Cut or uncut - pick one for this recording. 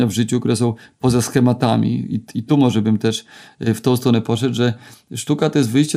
uncut